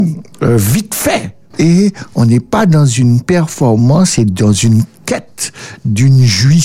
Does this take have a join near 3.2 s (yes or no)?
no